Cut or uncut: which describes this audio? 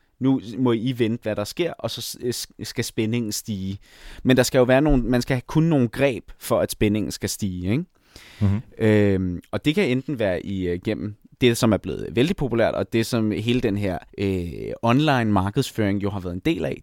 cut